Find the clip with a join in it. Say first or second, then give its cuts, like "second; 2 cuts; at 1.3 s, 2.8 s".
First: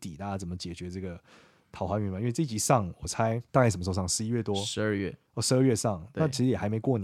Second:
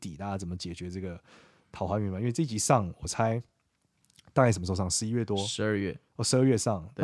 first; 1 cut; at 3.5 s